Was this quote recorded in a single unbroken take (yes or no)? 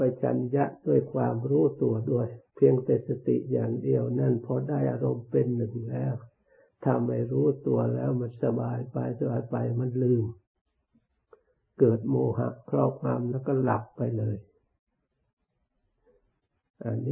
no